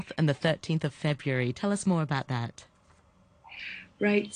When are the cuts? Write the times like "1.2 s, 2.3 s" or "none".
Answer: none